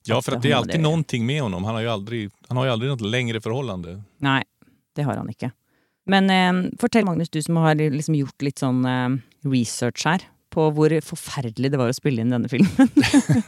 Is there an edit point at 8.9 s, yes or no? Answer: no